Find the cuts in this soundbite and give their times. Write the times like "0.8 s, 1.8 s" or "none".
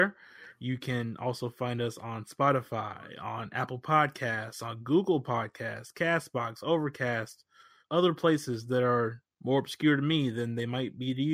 7.8 s